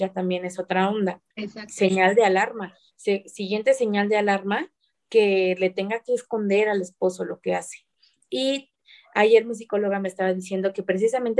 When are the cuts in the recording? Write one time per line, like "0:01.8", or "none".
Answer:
0:01.3
0:08.2